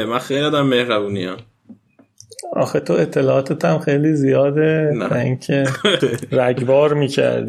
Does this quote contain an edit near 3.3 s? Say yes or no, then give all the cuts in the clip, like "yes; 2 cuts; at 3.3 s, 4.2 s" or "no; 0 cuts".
no; 1 cut; at 6.0 s